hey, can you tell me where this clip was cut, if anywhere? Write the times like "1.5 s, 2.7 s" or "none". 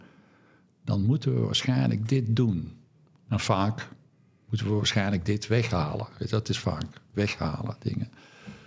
none